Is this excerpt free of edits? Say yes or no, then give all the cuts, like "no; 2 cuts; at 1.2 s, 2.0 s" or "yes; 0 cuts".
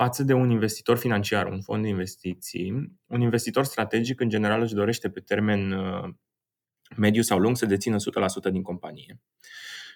yes; 0 cuts